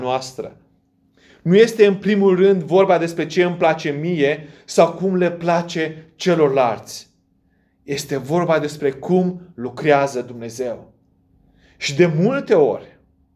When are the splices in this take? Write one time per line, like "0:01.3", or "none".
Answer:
none